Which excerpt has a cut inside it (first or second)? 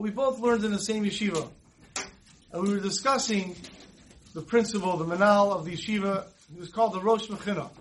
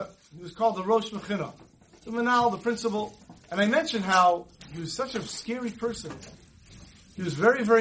second